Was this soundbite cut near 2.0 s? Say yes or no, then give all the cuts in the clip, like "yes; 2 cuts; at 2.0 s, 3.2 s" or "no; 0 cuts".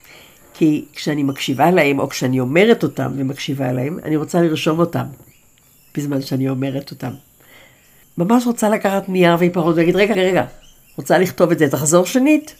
no; 2 cuts; at 8.0 s, 10.1 s